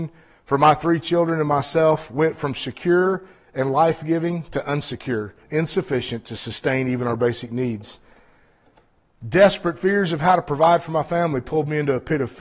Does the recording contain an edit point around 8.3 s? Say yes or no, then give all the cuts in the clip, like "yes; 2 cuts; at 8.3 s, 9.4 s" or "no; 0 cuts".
no; 1 cut; at 5.4 s